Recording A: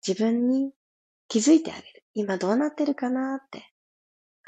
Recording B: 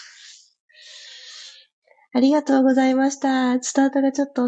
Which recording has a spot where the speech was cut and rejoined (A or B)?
A